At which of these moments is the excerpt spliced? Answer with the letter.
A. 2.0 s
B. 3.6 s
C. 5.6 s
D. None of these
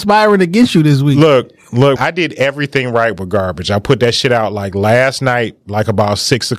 A